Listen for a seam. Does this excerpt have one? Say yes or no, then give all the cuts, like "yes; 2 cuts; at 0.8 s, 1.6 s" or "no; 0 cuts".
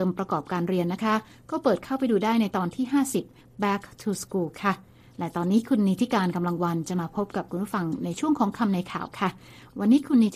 no; 0 cuts